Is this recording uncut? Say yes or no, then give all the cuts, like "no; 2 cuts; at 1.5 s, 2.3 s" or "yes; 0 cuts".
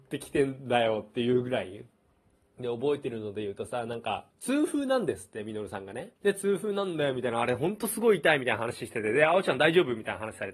no; 2 cuts; at 4.3 s, 6.2 s